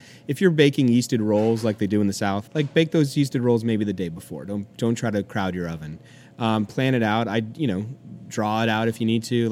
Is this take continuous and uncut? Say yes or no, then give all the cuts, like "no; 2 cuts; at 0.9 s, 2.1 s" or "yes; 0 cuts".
no; 1 cut; at 2.5 s